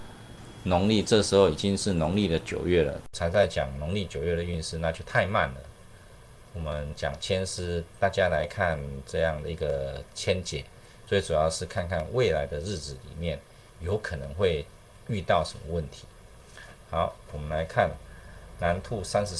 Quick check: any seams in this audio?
no; 0 cuts

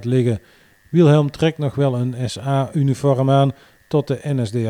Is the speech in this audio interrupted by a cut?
no; 0 cuts

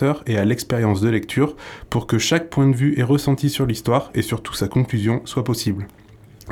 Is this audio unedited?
yes; 0 cuts

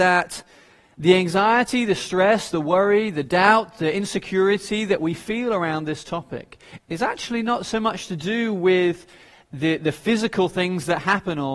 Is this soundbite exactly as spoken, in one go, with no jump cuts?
yes; 0 cuts

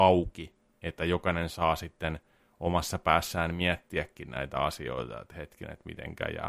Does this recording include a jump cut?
no; 0 cuts

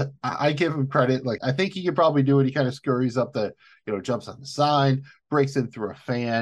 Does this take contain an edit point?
yes; 1 cut; at 1.4 s

